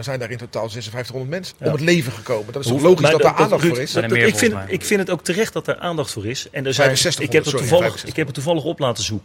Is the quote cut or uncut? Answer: cut